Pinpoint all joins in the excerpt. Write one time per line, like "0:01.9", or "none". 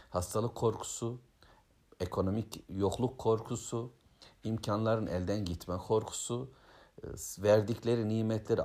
none